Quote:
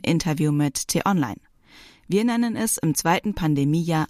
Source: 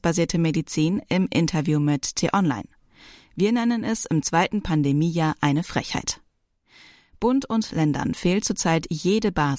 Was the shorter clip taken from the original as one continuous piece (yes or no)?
yes